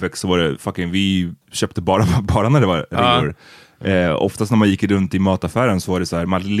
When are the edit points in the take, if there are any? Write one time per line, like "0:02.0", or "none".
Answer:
0:01.4